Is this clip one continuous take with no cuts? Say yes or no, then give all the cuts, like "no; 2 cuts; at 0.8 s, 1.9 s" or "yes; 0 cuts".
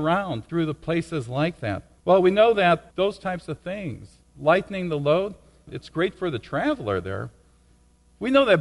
no; 1 cut; at 2.0 s